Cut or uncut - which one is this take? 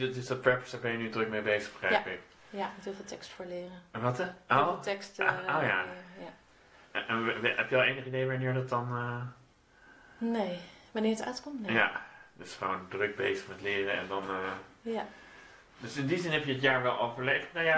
uncut